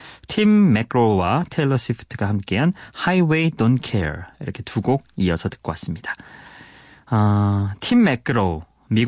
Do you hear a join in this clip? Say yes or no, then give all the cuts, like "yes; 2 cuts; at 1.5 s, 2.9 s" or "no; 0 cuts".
no; 0 cuts